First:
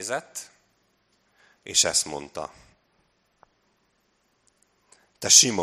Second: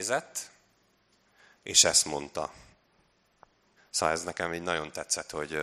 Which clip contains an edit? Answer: second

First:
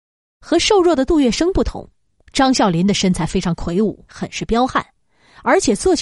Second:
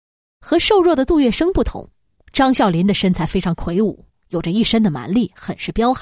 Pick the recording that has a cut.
first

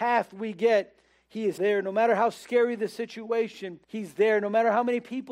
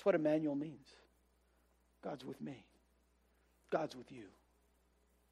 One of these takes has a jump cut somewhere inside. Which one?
first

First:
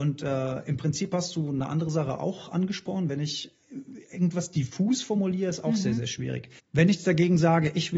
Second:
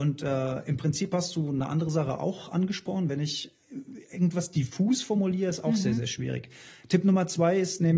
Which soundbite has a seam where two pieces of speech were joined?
first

